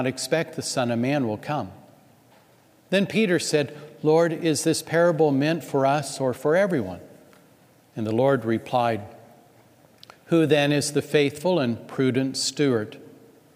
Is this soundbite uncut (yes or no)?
yes